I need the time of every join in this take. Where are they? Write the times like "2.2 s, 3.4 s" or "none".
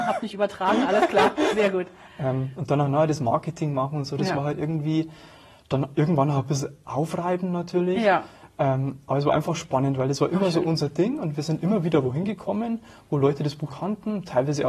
13.7 s